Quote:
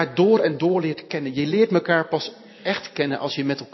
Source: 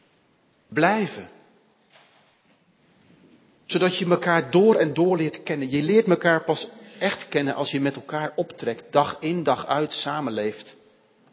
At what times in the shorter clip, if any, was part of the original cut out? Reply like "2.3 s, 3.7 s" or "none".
none